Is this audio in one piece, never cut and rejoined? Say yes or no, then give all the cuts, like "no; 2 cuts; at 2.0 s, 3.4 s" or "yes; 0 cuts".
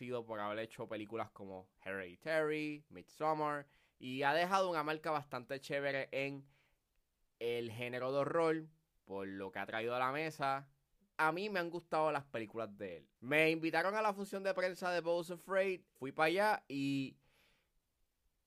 no; 2 cuts; at 13.2 s, 16.0 s